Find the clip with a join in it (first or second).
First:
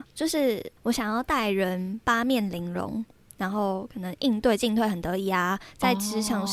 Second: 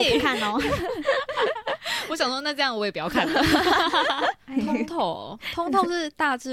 second